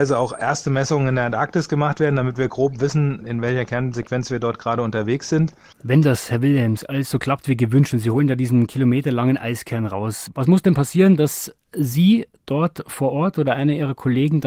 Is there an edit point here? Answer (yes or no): yes